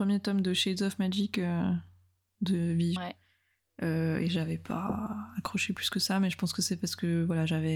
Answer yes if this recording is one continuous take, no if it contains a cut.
no